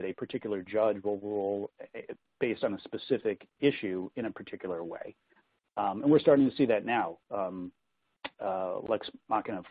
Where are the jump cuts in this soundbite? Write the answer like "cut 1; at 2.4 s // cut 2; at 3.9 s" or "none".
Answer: cut 1; at 5.6 s